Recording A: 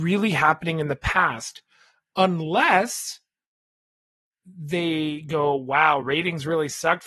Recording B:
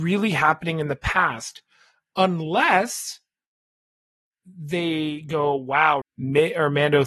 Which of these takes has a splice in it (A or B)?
B